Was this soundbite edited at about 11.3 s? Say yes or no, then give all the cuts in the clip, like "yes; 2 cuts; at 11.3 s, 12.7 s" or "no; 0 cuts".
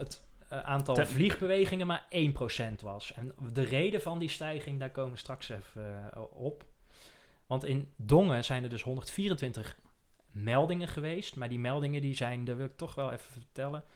no; 0 cuts